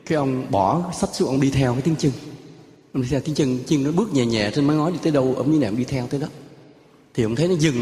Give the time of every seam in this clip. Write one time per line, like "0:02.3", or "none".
none